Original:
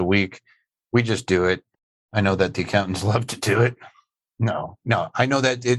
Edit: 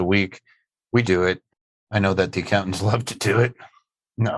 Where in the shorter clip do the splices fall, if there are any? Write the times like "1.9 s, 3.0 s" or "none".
1.0 s